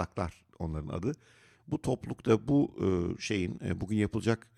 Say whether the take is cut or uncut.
cut